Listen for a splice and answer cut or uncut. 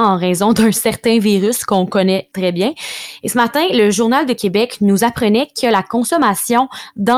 cut